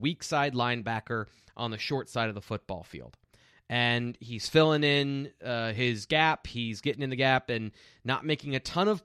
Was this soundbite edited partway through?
no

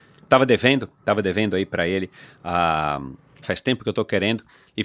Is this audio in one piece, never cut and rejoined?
no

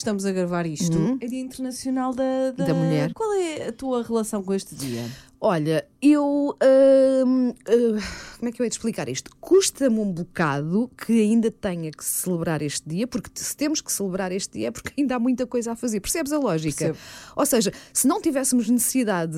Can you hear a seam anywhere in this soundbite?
yes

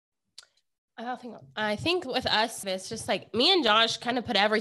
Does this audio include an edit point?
yes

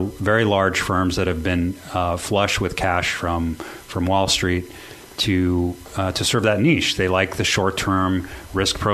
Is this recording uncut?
yes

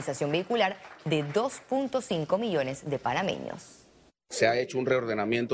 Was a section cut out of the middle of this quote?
no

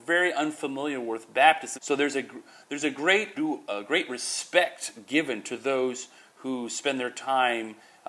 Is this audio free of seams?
no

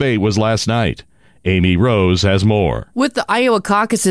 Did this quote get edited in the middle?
no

